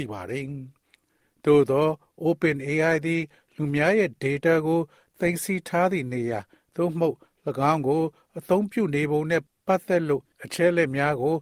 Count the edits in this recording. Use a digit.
1